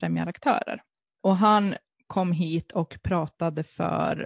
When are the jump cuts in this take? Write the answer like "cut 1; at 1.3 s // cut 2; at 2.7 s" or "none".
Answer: none